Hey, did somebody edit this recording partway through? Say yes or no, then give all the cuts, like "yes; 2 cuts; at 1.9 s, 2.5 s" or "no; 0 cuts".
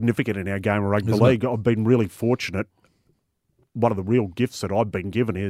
no; 0 cuts